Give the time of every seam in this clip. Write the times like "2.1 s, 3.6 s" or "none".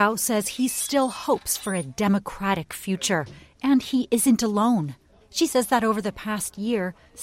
5.2 s